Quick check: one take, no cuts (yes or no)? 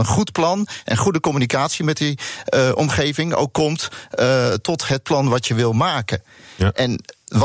yes